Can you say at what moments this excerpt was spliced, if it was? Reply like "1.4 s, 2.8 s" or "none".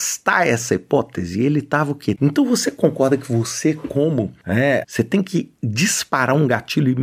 2.2 s, 4.8 s